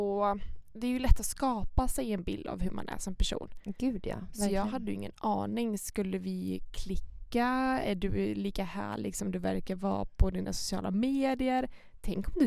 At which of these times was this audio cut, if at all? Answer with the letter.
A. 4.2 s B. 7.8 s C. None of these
C